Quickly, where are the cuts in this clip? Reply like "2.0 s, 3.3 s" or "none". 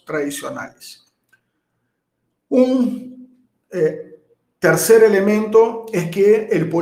none